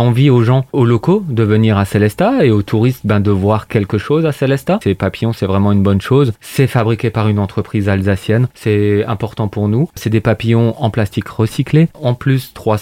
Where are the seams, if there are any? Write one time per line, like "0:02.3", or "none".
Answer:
0:04.8